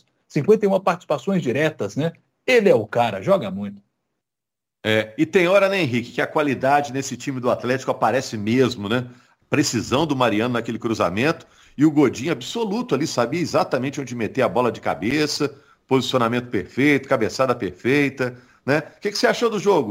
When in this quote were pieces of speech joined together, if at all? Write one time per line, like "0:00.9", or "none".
0:09.4